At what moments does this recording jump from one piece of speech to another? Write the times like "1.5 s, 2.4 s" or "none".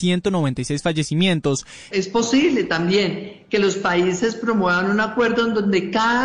1.9 s

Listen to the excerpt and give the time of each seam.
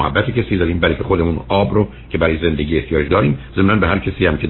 3.1 s

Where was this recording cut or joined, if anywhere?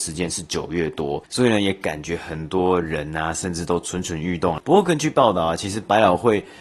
none

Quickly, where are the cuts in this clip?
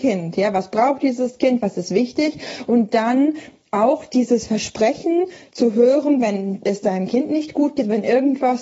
none

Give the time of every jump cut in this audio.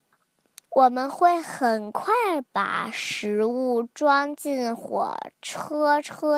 none

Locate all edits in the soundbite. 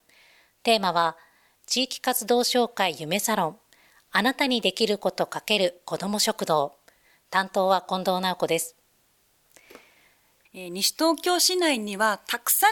10.5 s

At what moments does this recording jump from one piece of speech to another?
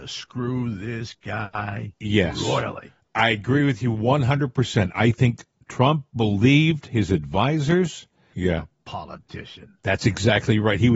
8.3 s

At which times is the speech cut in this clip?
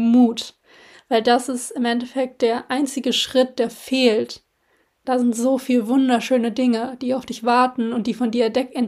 0.9 s, 5.0 s

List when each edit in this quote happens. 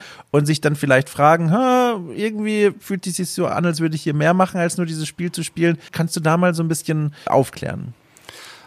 5.9 s, 7.3 s

